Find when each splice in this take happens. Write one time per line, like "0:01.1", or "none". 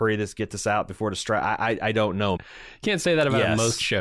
0:02.4